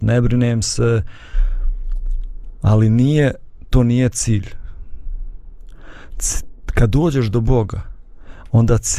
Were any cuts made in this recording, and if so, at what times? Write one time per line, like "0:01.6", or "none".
none